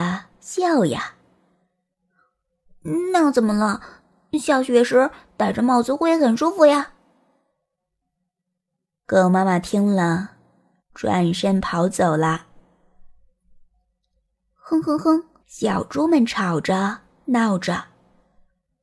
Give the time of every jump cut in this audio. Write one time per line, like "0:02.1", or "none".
0:10.8
0:15.4